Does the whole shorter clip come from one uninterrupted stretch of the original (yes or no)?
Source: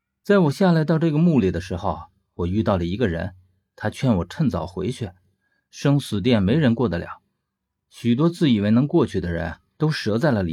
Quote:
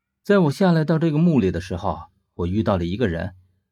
yes